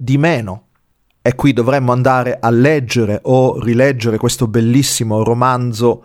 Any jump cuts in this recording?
no; 0 cuts

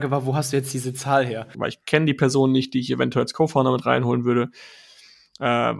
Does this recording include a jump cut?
yes; 1 cut; at 1.5 s

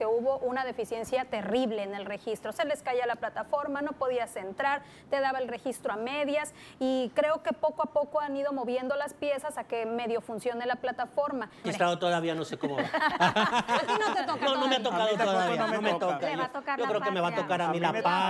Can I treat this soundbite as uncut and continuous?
no; 1 cut; at 11.6 s

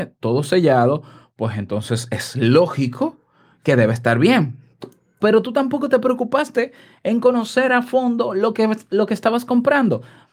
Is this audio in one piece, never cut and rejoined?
no; 1 cut; at 5.2 s

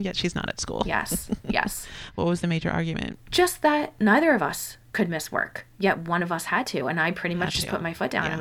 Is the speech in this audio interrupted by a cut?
no; 0 cuts

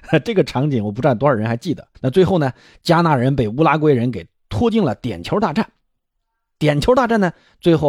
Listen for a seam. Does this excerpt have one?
yes; 1 cut; at 1.9 s

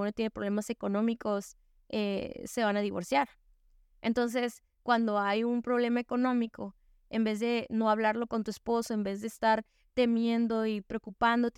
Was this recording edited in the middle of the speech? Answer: no; 0 cuts

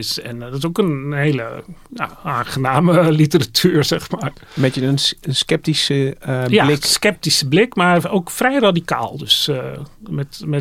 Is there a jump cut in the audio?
no; 0 cuts

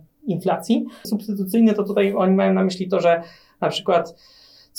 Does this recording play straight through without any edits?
no; 1 cut; at 1.0 s

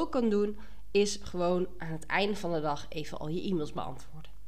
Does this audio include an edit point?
no; 0 cuts

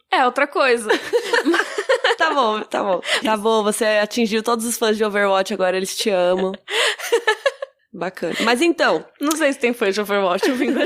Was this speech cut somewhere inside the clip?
yes; 1 cut; at 3.2 s

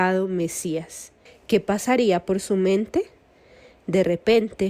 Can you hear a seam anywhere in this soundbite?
yes; 1 cut; at 1.3 s

